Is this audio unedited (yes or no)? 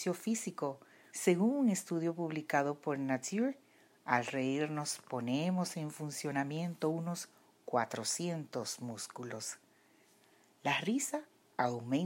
no